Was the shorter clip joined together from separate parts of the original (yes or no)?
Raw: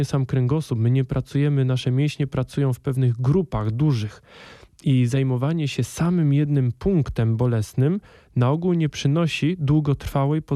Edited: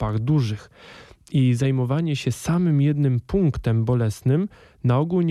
no